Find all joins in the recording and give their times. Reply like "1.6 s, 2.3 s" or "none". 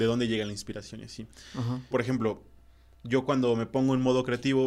1.9 s